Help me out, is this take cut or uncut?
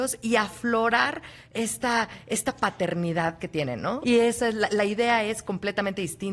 cut